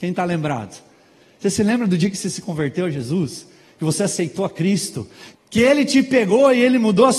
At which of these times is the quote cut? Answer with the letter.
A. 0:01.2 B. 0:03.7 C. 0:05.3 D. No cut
C